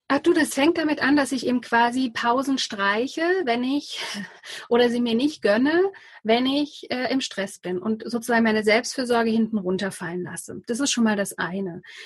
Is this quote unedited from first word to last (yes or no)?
yes